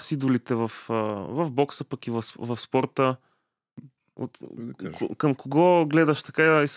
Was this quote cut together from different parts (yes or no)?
no